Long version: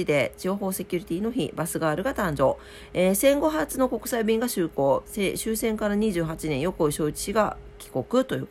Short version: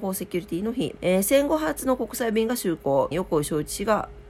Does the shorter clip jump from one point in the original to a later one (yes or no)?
yes